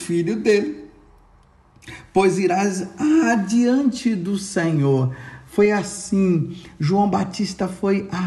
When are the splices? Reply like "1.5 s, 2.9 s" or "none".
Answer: none

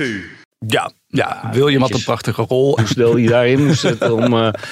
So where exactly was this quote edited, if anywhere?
2.8 s

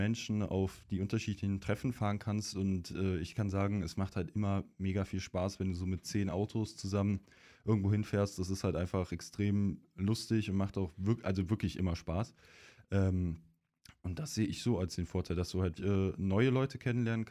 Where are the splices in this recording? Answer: 15.8 s

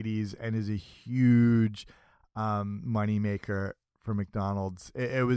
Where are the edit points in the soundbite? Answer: none

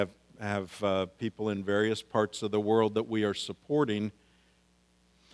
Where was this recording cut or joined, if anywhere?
none

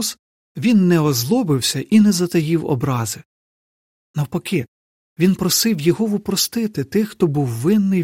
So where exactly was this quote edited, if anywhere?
none

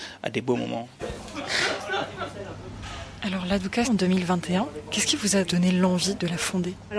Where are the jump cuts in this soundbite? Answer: 1.0 s, 3.8 s

